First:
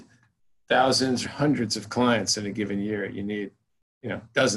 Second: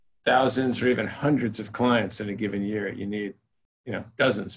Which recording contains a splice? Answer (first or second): first